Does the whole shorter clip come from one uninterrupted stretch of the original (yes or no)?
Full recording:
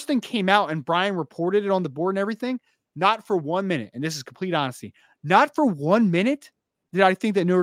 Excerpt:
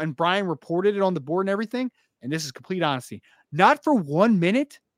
no